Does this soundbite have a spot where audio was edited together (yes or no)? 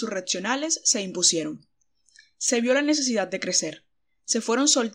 no